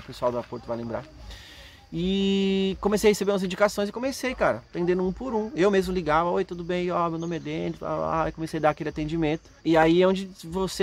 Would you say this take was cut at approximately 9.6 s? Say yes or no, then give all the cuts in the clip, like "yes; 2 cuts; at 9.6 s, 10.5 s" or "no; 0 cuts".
yes; 1 cut; at 9.6 s